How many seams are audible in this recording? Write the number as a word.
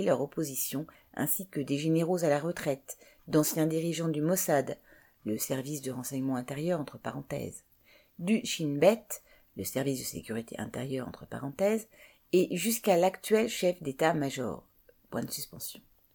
zero